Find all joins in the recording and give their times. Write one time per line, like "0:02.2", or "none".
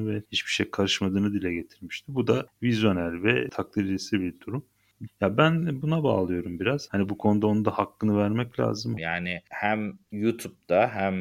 0:05.1
0:06.9
0:09.0